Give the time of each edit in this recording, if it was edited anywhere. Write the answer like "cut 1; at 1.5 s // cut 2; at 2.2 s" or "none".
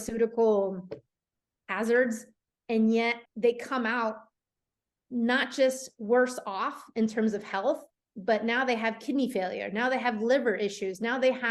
cut 1; at 3.3 s